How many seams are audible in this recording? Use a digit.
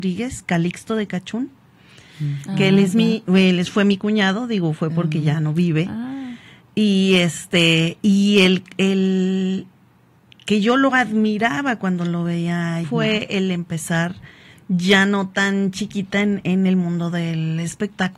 1